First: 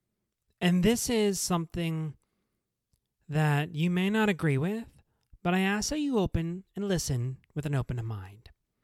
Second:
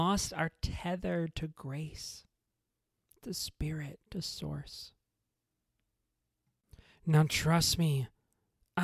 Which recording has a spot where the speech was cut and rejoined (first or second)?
second